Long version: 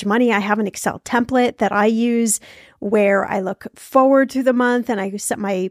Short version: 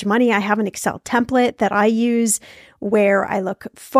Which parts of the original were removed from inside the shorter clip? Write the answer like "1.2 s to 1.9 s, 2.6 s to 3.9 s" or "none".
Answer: none